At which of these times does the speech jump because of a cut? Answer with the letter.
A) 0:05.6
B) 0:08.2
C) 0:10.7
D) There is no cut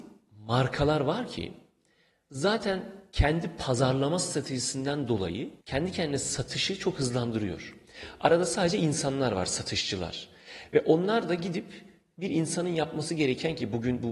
A